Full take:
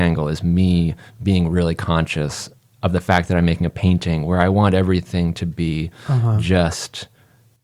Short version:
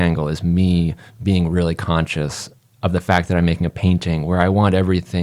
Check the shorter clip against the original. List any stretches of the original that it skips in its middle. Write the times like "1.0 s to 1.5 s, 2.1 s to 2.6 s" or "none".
none